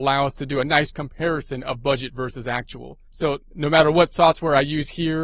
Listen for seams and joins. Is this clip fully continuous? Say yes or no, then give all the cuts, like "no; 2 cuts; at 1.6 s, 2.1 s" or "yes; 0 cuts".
no; 1 cut; at 3.1 s